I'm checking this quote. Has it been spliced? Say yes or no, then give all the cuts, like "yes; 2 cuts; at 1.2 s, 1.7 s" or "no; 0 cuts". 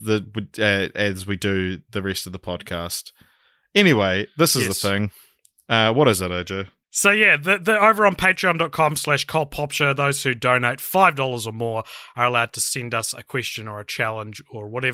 no; 0 cuts